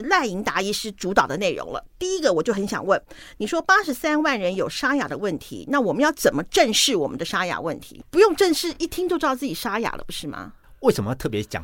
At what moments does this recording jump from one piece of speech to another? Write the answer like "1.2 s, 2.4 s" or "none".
none